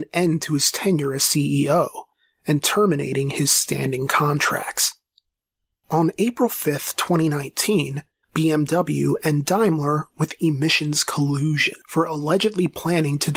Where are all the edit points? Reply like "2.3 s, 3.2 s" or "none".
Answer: 8.2 s